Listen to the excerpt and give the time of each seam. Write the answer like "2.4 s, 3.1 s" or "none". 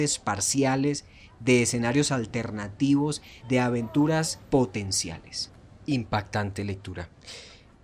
3.4 s